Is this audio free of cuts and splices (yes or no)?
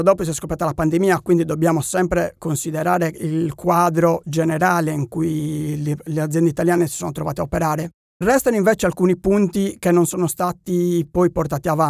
yes